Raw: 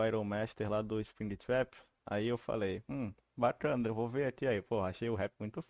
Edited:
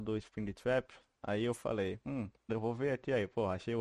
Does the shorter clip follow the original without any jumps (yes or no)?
no